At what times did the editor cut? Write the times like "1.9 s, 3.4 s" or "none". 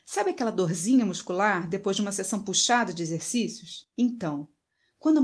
3.9 s